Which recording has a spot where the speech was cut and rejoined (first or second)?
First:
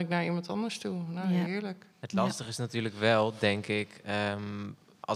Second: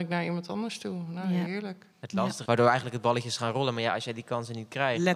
second